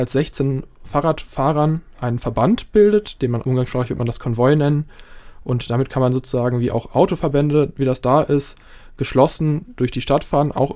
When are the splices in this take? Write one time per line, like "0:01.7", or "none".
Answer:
0:03.4